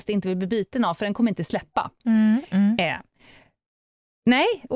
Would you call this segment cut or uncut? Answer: uncut